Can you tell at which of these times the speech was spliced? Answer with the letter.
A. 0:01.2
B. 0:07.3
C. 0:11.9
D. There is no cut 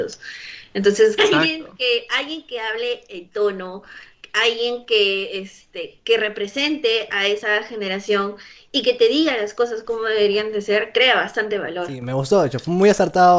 A